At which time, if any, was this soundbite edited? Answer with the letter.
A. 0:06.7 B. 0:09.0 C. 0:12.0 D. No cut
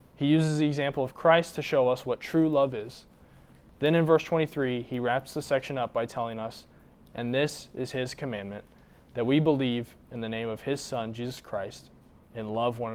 D